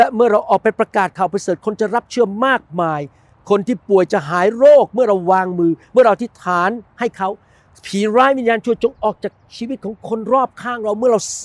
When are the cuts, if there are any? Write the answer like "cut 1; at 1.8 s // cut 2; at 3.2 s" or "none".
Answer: none